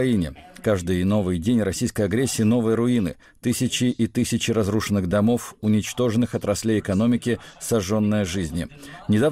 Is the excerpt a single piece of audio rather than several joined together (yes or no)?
yes